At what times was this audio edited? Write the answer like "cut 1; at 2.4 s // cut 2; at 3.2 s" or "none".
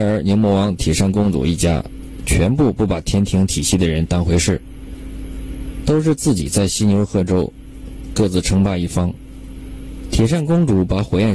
none